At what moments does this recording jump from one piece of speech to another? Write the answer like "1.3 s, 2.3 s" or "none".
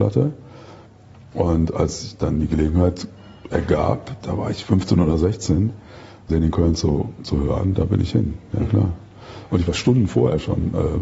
6.3 s